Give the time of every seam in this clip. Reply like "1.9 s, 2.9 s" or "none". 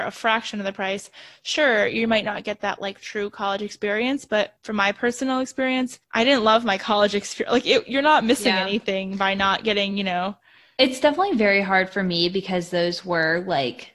none

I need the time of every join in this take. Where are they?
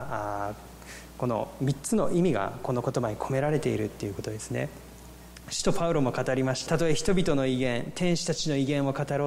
6.6 s

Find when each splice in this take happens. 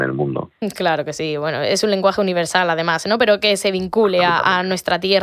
none

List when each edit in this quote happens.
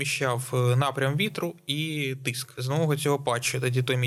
2.6 s

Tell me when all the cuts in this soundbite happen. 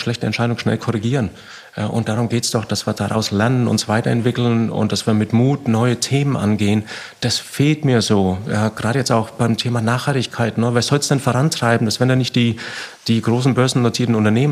none

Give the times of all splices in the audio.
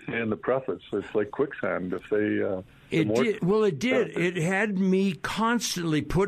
3.4 s

